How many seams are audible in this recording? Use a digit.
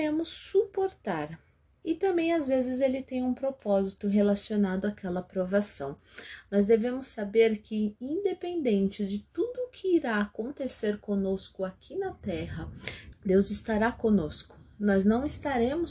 1